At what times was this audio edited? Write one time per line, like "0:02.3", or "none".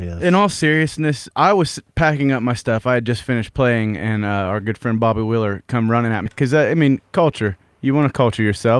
0:06.3

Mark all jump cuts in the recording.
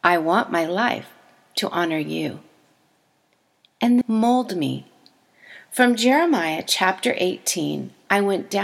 0:04.0

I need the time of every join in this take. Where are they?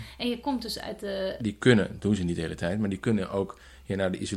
0:01.4

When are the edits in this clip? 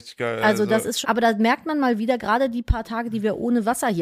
0:01.0

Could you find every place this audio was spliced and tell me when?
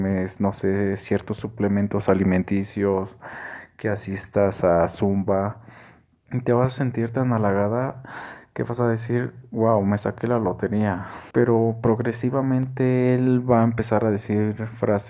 0:06.2
0:11.3

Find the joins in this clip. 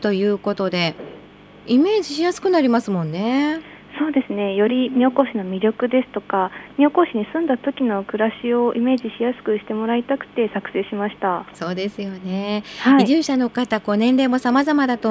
none

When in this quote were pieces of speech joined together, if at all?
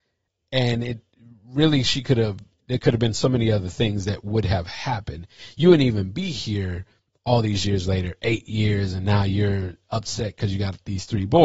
none

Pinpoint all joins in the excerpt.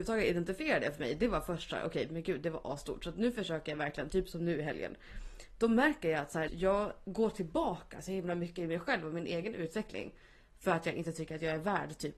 0:06.5

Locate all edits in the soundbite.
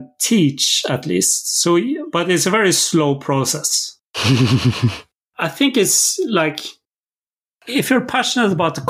0:04.0

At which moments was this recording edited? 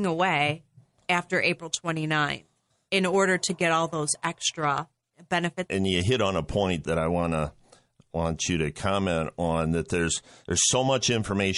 0:05.7

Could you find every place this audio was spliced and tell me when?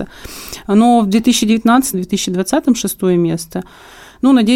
0:01.9

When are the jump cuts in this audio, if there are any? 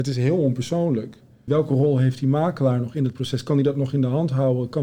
0:01.5

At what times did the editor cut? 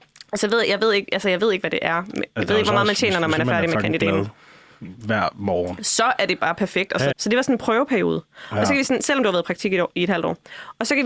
0:07.1

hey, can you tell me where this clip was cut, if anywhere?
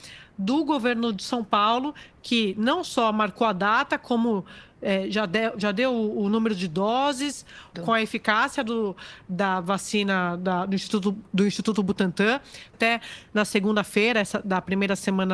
0:07.7
0:12.7

